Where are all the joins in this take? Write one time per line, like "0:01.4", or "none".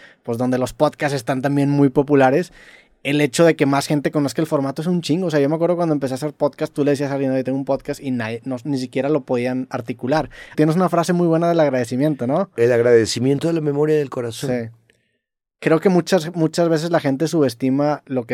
0:10.5